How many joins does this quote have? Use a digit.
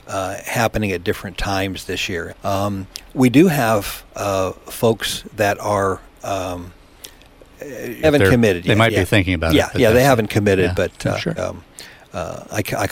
3